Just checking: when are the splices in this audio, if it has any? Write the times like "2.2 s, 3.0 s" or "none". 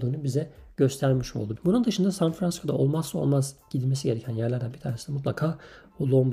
1.6 s